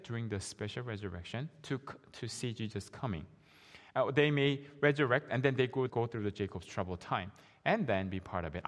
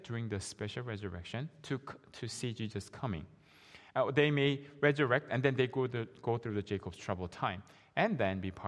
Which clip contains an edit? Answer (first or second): first